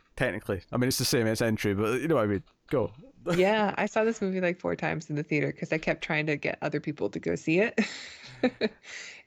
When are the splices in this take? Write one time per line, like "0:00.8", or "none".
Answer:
none